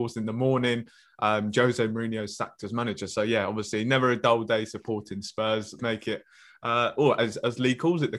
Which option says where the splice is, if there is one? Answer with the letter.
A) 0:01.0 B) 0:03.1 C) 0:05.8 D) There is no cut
C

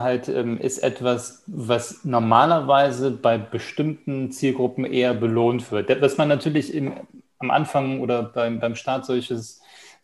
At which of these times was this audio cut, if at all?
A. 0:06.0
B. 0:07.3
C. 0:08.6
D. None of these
D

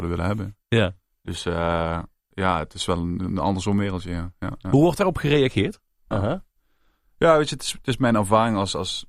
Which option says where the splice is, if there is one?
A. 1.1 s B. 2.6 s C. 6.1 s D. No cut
C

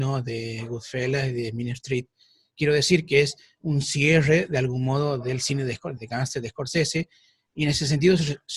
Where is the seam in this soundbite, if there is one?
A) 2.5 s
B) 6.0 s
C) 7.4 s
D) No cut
B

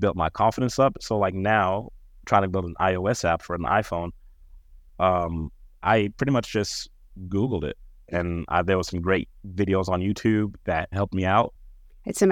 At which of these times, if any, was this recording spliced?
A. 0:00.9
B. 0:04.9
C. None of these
C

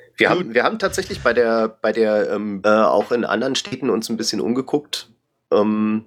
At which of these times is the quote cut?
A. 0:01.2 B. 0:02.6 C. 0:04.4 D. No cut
B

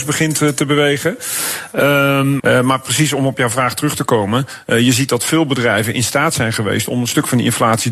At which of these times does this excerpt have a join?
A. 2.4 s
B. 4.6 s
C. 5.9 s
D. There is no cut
A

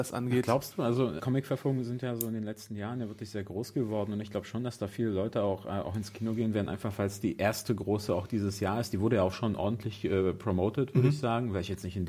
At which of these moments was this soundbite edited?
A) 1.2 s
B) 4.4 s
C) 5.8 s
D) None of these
A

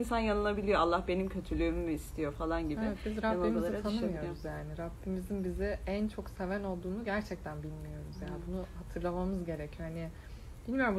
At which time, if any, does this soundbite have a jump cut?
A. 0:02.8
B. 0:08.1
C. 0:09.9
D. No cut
D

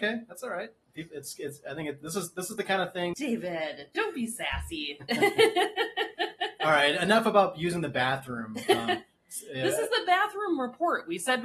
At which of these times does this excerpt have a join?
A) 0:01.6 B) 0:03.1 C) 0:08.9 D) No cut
B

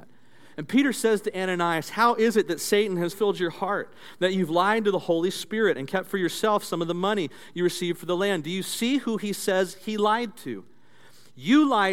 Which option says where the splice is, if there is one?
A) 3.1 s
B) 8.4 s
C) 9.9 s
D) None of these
A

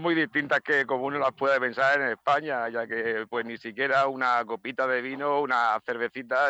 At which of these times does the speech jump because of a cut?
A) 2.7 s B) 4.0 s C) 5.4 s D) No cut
D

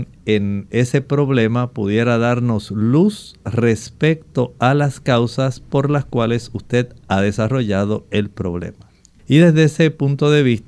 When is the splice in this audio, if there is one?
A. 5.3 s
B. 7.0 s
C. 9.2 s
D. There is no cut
C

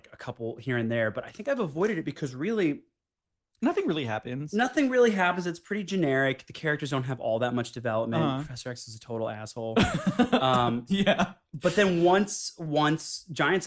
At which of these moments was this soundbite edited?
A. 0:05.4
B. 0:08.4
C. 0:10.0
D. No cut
D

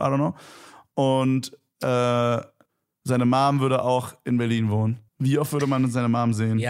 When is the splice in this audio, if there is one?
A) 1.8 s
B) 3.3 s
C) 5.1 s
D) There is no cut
C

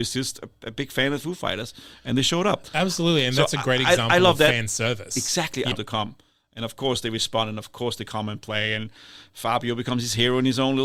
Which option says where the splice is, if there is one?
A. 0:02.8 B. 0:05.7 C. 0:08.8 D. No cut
B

